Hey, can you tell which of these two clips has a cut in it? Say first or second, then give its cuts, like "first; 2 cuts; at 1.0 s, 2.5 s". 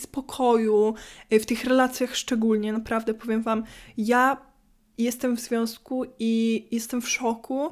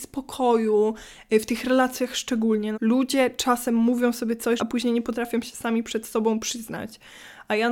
second; 2 cuts; at 2.7 s, 4.6 s